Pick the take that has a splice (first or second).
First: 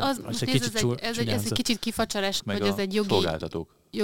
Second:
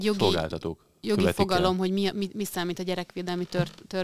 first